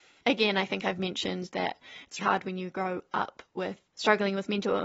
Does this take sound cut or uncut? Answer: cut